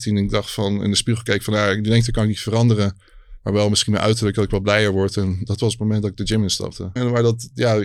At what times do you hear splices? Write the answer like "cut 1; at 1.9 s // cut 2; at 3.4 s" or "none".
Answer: cut 1; at 7.0 s